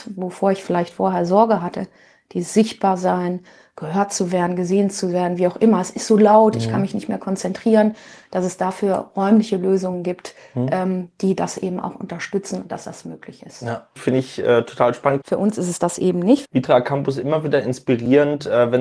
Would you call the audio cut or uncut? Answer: cut